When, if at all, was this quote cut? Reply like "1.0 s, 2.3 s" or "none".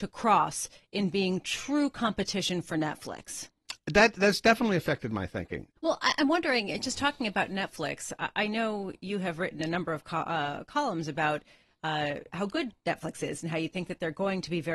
5.7 s